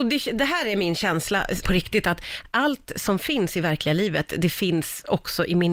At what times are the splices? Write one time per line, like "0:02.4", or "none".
0:01.6